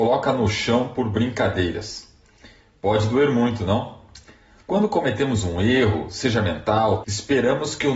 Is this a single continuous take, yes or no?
no